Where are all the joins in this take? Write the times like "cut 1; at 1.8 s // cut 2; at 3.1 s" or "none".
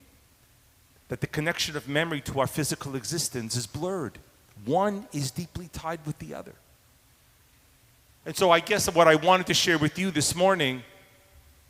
none